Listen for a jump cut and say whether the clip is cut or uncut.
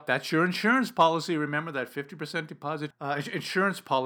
cut